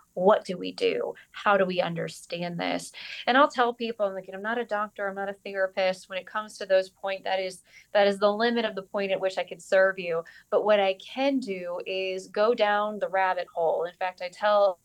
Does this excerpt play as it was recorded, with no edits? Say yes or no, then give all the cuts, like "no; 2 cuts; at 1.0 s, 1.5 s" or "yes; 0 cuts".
yes; 0 cuts